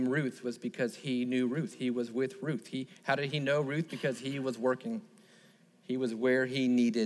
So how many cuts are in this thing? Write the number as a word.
zero